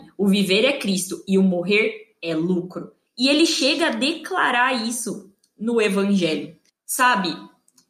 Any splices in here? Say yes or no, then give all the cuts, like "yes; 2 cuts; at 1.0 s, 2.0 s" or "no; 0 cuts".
yes; 2 cuts; at 3.1 s, 6.7 s